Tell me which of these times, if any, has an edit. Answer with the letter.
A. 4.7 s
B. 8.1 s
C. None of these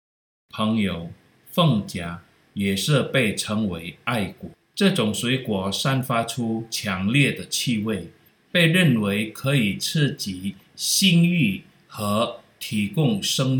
C